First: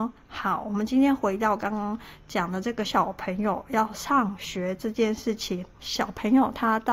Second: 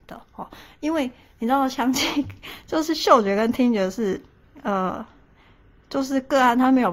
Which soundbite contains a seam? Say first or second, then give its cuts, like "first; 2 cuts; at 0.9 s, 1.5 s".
first; 2 cuts; at 2.8 s, 5.8 s